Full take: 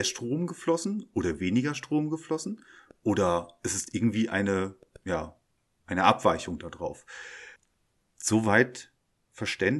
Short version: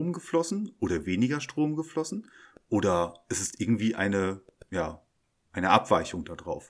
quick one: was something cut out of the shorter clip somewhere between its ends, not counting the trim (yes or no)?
no